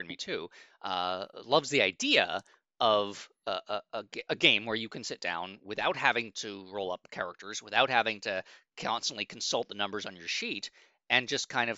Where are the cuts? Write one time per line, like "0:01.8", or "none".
none